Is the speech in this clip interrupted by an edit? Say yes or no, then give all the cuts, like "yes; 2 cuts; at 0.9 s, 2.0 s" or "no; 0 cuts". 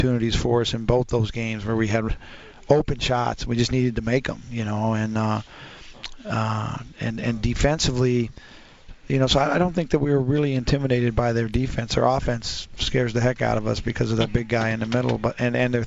no; 0 cuts